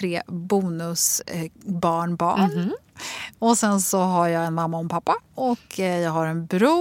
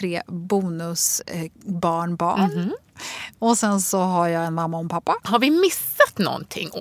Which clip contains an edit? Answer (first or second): second